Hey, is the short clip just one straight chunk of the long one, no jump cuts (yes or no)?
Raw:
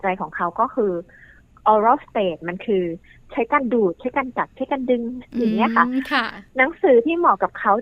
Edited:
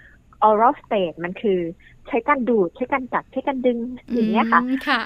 yes